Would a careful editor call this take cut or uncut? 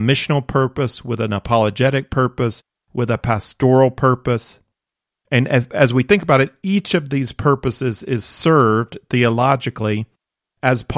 uncut